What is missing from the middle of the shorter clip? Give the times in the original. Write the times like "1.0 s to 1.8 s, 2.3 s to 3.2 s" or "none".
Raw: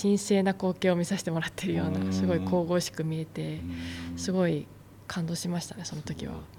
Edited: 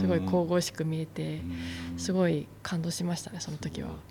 4.8 s to 5.0 s